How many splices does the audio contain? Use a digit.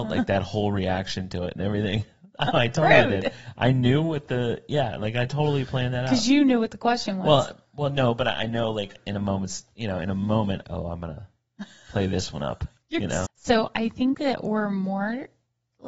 2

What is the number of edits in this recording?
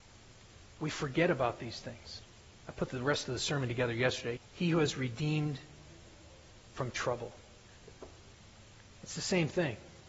2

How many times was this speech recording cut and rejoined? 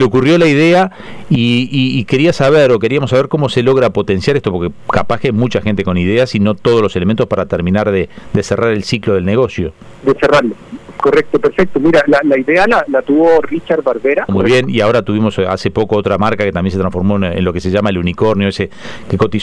1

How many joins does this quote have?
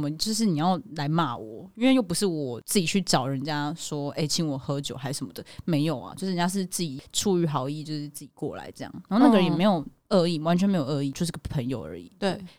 0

